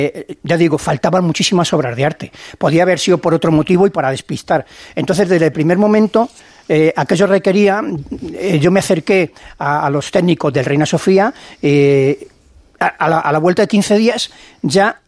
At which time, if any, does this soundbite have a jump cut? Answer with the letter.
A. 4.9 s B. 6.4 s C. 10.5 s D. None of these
C